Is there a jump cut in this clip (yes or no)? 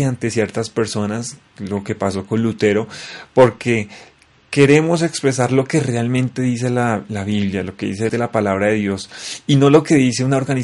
yes